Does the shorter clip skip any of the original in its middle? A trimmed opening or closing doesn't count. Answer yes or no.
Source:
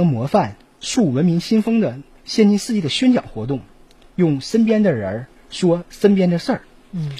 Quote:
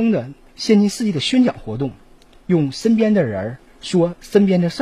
no